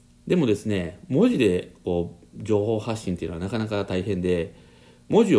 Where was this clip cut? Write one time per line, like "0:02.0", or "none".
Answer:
none